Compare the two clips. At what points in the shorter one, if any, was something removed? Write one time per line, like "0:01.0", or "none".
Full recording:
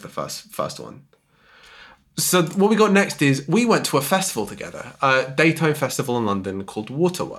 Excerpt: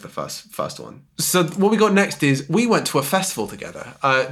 0:01.1